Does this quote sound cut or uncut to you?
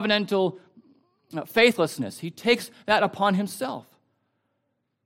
uncut